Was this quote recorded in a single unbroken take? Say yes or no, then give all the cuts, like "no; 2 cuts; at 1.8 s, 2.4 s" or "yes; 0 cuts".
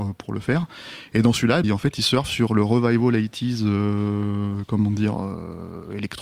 no; 1 cut; at 1.6 s